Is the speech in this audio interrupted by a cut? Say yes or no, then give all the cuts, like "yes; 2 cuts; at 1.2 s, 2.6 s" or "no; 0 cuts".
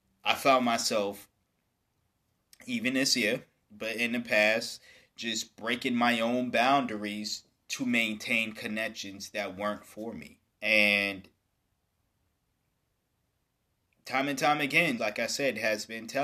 yes; 2 cuts; at 10.5 s, 15.0 s